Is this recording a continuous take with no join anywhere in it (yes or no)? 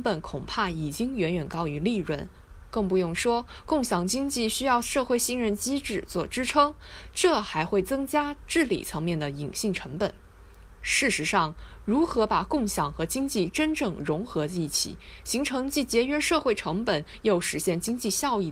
yes